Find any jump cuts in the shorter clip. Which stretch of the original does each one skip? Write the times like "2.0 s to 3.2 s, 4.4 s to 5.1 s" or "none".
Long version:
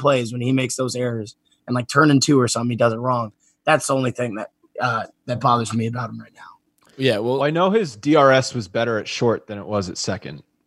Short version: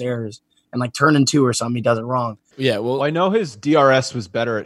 3.5 s to 6.9 s